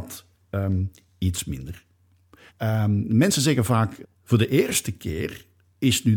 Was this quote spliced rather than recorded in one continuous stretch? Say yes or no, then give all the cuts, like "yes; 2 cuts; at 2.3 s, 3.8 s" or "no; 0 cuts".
yes; 2 cuts; at 2.5 s, 4.0 s